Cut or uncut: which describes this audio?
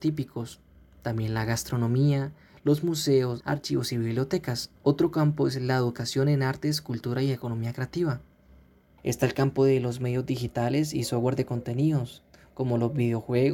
cut